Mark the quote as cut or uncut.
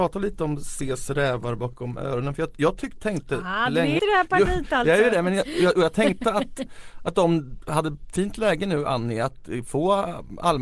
cut